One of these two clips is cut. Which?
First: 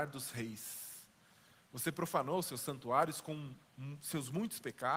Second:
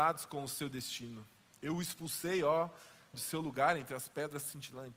second; 2 cuts; at 1.5 s, 3.1 s

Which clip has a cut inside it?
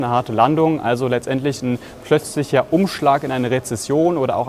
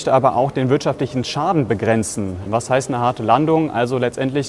second; 1 cut; at 2.5 s

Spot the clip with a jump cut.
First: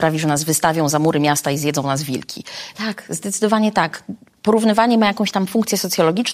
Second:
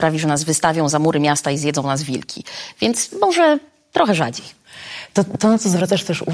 first; 1 cut; at 2.7 s

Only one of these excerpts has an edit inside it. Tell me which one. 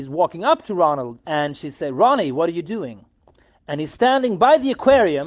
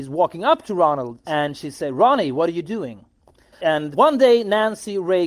second; 1 cut; at 3.5 s

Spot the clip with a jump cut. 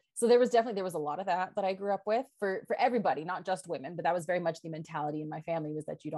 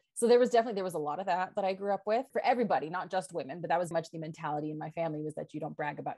second; 2 cuts; at 2.3 s, 3.9 s

